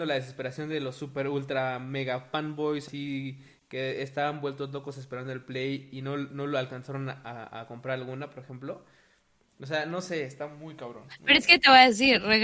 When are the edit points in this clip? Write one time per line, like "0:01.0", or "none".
none